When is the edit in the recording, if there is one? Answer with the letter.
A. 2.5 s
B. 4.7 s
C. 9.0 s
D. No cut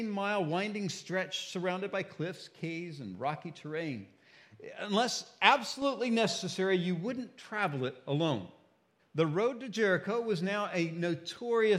C